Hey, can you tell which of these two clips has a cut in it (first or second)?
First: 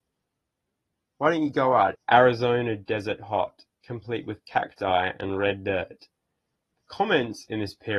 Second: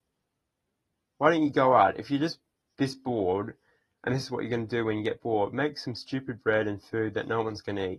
first